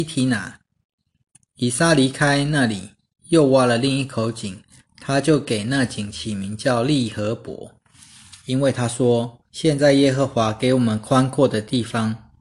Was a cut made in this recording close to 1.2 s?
no; 2 cuts; at 4.8 s, 9.5 s

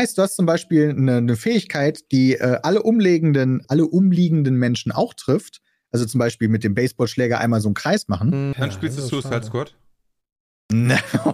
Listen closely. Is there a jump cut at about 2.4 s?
no; 2 cuts; at 3.6 s, 8.5 s

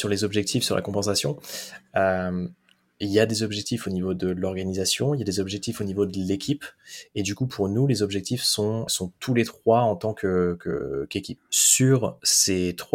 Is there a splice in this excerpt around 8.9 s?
yes; 2 cuts; at 8.9 s, 11.4 s

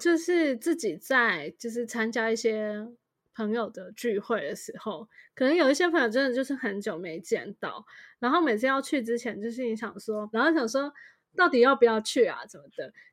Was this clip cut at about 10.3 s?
yes; 1 cut; at 10.3 s

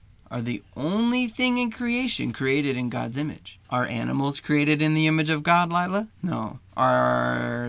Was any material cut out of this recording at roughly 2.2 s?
no; 2 cuts; at 3.6 s, 6.1 s

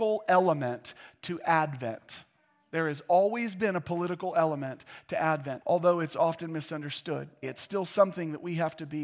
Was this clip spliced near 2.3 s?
no; 2 cuts; at 5.6 s, 7.4 s

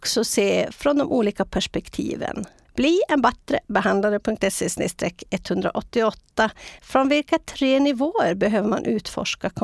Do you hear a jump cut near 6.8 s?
yes; 2 cuts; at 2.7 s, 6.8 s

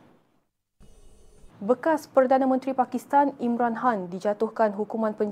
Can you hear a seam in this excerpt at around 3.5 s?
no; 1 cut; at 1.5 s

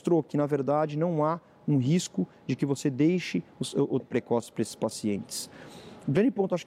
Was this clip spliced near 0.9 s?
no; 1 cut; at 4.0 s

